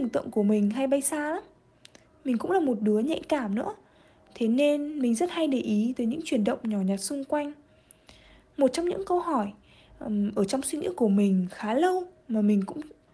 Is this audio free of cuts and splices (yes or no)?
yes